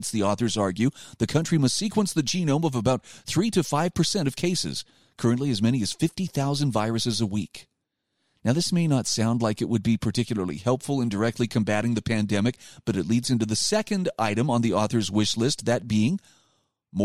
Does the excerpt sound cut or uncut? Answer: uncut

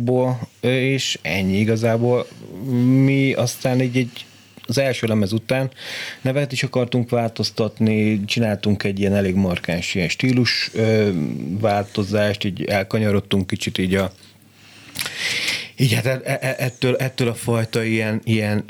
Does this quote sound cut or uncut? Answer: uncut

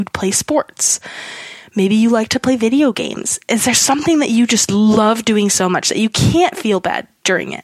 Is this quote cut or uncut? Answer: uncut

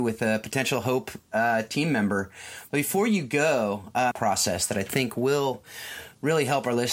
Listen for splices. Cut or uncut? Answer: cut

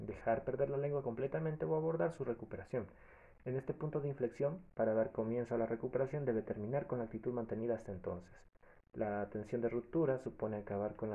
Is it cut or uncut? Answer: uncut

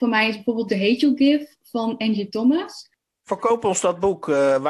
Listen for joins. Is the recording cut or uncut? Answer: uncut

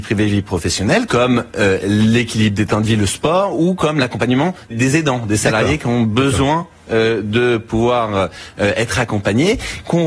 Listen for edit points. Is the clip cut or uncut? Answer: cut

